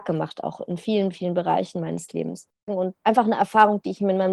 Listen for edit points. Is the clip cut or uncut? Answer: cut